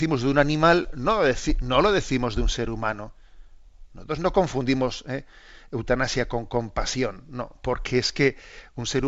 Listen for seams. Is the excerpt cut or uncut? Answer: uncut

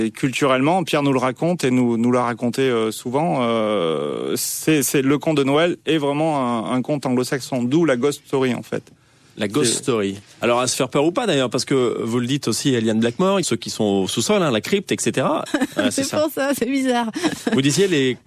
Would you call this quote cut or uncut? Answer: cut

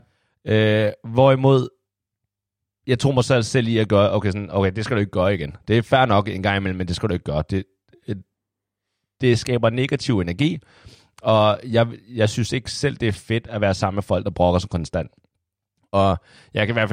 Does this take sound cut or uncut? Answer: uncut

